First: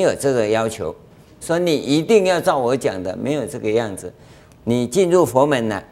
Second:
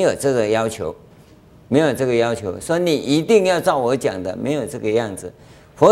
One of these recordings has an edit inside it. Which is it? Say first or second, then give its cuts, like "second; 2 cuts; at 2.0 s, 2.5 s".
first; 2 cuts; at 1.4 s, 4.5 s